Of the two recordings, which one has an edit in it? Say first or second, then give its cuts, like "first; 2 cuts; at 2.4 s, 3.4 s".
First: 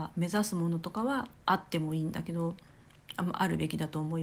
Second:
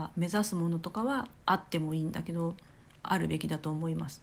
second; 1 cut; at 3.0 s